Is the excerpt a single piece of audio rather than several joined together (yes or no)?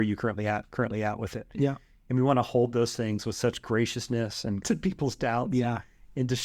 no